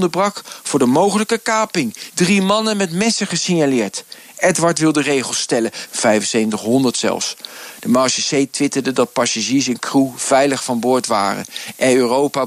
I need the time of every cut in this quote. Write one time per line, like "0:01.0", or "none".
0:02.1
0:05.9
0:07.8

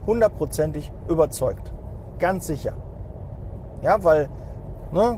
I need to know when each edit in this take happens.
none

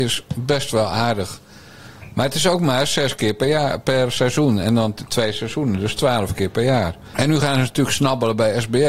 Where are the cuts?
0:07.1

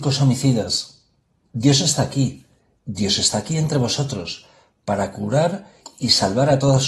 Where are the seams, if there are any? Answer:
0:01.5

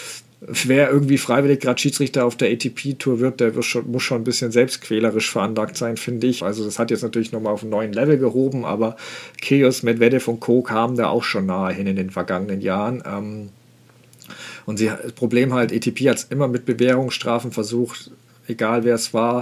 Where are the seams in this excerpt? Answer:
0:06.4

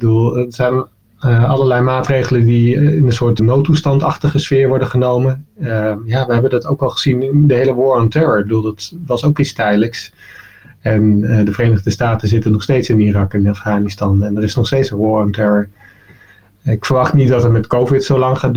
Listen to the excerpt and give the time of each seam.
0:03.4

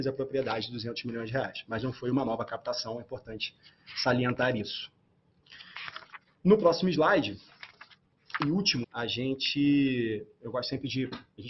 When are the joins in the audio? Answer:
0:08.8

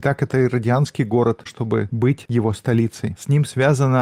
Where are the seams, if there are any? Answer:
0:01.5

